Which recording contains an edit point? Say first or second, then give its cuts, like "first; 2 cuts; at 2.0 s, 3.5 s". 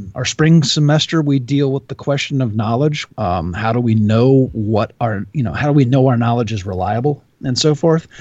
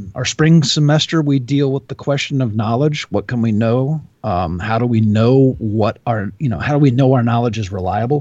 first; 1 cut; at 3.1 s